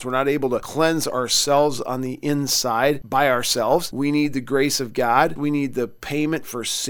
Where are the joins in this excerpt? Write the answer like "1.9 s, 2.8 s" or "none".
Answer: 5.4 s

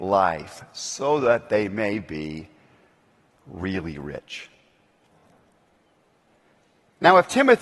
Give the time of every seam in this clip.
none

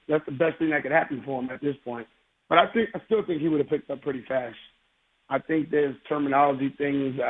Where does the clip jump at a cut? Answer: none

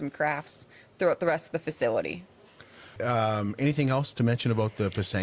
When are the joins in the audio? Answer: 3.0 s

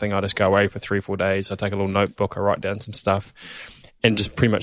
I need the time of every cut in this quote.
none

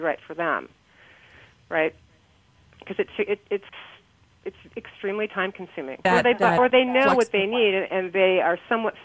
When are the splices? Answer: 6.0 s

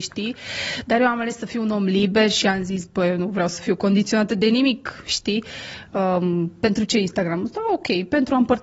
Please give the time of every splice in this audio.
none

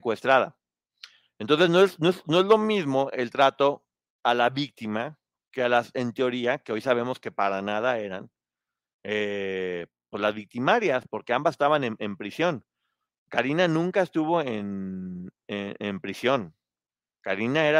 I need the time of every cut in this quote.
none

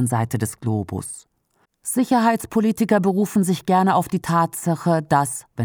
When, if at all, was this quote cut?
1.6 s

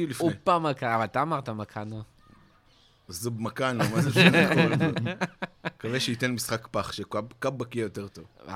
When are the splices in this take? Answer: none

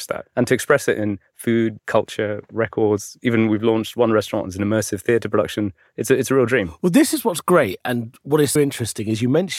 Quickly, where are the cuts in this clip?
1.8 s, 8.6 s

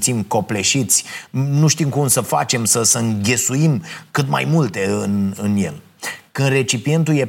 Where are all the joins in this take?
none

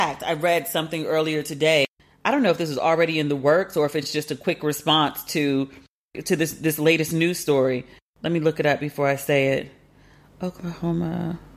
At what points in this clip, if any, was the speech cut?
none

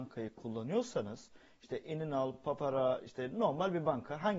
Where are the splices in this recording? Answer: none

